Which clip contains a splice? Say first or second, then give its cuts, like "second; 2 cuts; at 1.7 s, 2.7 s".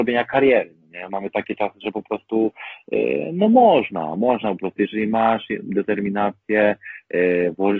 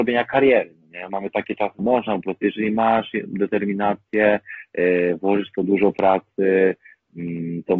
second; 1 cut; at 1.8 s